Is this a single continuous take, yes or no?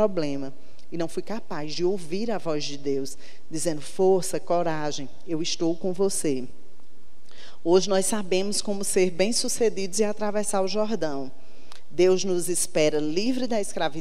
yes